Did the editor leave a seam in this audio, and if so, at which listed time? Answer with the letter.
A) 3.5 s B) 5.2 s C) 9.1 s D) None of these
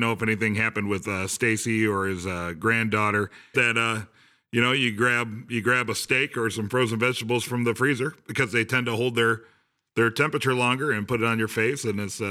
A